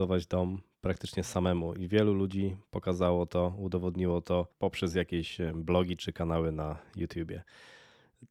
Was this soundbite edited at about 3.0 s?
no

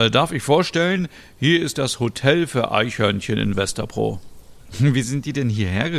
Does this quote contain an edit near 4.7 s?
no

